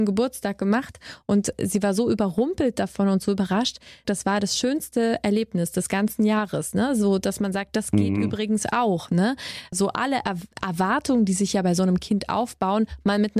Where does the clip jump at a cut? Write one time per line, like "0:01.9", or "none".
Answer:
0:04.0